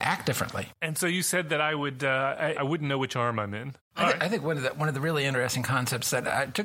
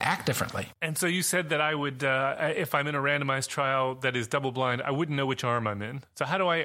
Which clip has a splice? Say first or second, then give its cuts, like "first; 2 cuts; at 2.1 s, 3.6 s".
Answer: first; 2 cuts; at 2.5 s, 3.8 s